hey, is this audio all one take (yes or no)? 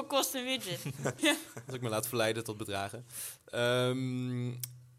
no